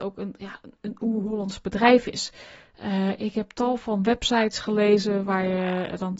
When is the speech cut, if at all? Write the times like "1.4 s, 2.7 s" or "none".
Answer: none